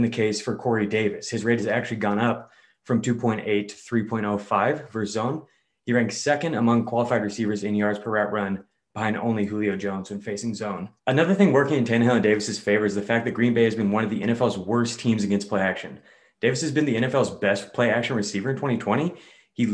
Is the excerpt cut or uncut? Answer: cut